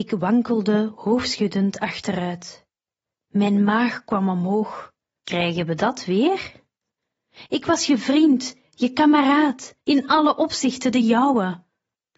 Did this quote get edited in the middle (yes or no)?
yes